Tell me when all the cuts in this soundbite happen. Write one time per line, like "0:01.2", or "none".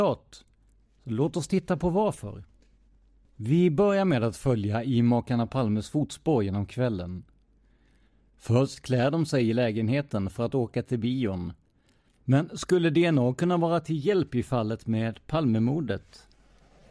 0:12.1